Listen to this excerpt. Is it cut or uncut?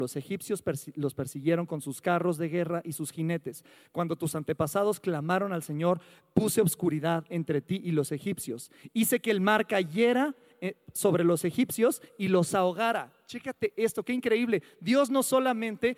uncut